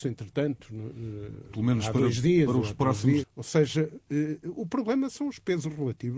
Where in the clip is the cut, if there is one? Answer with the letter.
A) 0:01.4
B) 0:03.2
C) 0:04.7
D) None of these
B